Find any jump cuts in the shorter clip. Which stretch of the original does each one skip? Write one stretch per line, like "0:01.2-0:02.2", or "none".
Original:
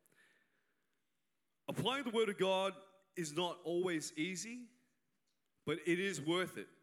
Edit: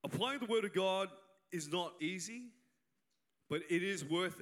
0:03.6-0:04.1